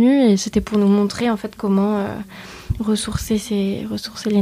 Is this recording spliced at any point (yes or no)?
no